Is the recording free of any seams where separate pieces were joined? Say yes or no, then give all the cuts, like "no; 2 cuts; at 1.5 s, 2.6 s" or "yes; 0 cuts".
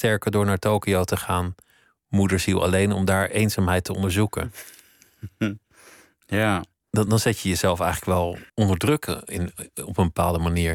no; 2 cuts; at 7.1 s, 8.5 s